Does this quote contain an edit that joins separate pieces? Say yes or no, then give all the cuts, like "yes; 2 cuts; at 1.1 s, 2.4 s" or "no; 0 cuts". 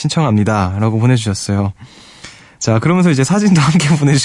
no; 0 cuts